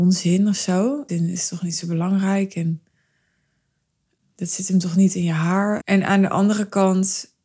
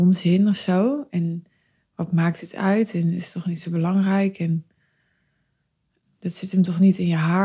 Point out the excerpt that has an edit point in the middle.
first; 2 cuts; at 1.1 s, 5.8 s

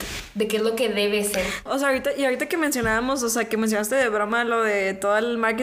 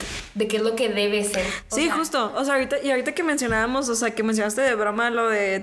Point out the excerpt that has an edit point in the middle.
first; 1 cut; at 1.7 s

